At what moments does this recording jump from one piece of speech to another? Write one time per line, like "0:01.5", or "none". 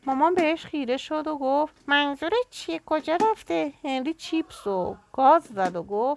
0:01.8